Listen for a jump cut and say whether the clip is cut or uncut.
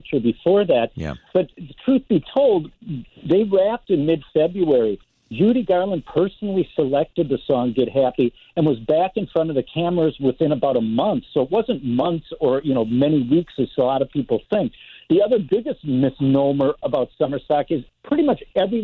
uncut